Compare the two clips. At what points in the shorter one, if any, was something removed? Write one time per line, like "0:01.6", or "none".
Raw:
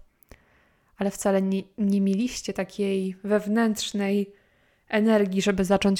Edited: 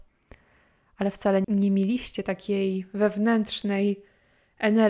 0:01.4